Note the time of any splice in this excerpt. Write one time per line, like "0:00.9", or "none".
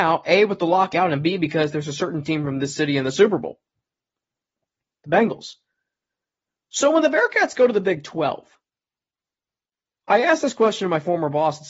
none